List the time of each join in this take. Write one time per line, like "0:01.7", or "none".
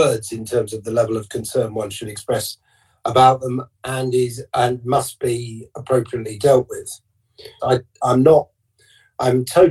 0:07.6